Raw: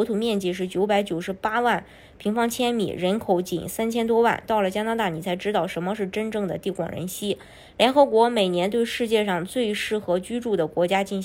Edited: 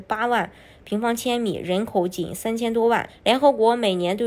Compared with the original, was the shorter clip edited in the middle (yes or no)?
yes